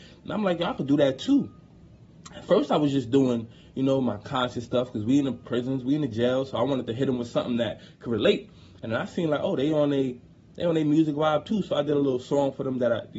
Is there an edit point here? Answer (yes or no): no